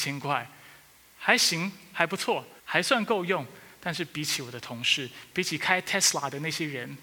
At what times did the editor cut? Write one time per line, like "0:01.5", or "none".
0:02.6
0:05.3